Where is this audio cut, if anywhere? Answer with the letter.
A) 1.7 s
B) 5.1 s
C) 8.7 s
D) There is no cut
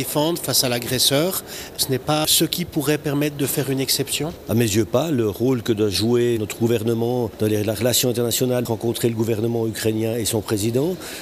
C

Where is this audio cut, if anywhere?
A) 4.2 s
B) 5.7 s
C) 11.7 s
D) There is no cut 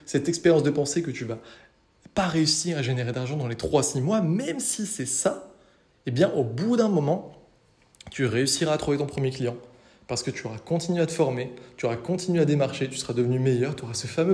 D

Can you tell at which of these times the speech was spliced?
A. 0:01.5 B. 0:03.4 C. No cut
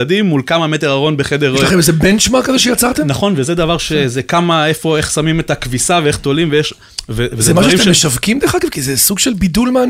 C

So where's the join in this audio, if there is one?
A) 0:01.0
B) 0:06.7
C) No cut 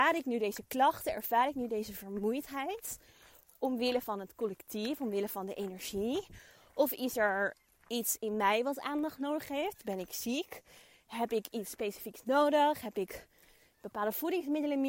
C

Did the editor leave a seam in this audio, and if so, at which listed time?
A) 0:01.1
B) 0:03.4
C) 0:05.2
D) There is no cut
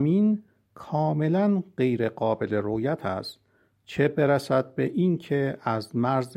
D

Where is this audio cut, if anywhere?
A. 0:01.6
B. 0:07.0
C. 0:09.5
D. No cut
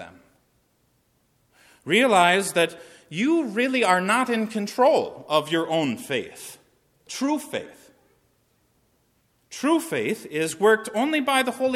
D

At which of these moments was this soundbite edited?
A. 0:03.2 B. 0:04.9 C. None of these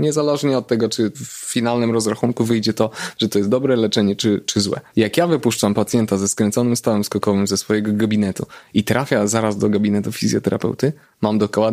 B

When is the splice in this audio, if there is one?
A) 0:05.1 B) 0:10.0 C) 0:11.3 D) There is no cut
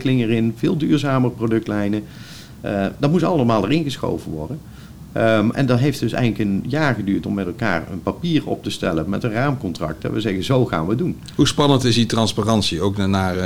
D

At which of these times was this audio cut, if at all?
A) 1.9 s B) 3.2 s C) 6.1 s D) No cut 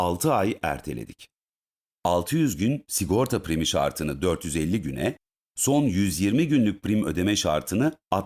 A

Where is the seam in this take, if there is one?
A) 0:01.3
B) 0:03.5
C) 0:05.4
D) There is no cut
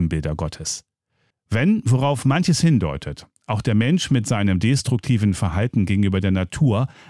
A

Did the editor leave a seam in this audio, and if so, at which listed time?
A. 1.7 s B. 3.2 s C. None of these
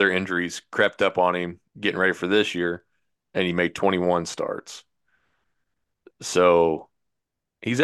A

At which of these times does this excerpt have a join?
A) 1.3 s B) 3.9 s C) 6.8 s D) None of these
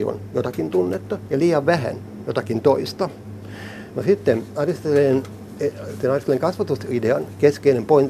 B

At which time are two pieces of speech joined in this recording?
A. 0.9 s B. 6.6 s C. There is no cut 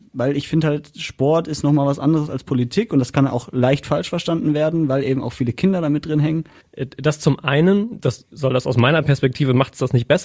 B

